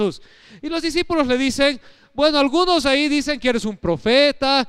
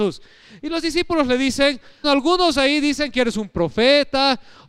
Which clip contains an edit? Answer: second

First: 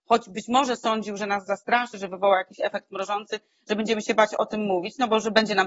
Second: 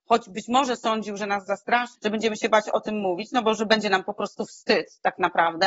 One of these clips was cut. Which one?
second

